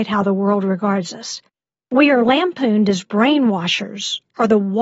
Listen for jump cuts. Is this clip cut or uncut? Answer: uncut